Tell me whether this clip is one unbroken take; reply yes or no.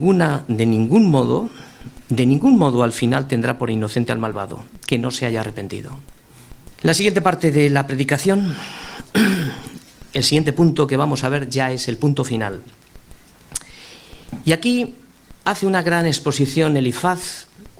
no